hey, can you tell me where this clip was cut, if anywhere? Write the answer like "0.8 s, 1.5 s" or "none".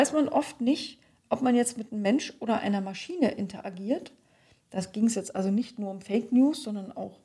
none